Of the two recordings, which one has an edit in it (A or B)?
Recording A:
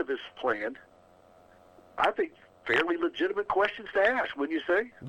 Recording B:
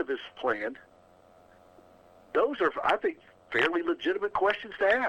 A